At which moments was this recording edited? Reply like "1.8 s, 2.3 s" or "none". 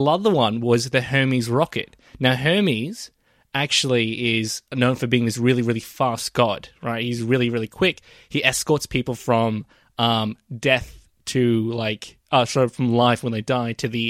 none